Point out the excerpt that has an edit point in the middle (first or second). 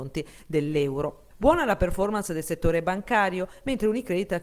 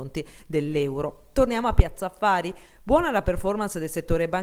first